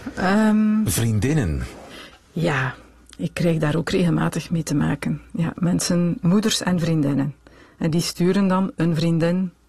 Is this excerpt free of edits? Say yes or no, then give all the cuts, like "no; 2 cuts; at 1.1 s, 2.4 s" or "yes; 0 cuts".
yes; 0 cuts